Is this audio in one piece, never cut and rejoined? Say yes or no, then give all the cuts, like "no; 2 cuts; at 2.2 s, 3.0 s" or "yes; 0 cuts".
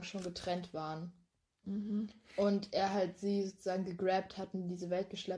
no; 1 cut; at 1.6 s